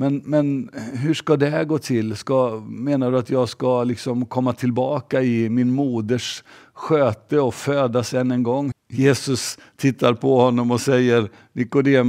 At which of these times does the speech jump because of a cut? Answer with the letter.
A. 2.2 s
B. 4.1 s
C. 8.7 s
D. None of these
C